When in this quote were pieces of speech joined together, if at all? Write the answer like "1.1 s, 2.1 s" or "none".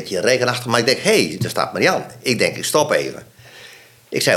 none